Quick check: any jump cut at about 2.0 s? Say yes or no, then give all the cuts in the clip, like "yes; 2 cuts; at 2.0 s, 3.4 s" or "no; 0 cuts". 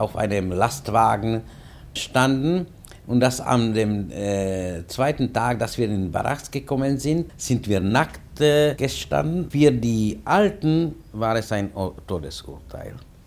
yes; 3 cuts; at 2.0 s, 7.3 s, 9.5 s